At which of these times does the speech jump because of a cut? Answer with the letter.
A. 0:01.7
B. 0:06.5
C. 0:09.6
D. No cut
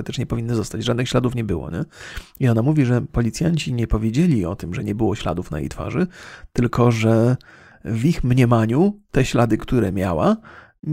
D